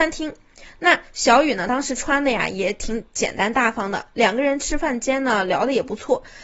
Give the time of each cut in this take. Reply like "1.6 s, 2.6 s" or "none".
none